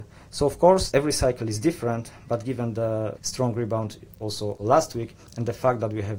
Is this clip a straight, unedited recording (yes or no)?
yes